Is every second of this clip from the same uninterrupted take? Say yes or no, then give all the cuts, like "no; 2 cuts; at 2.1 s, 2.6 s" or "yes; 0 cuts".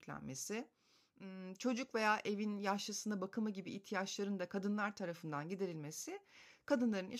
yes; 0 cuts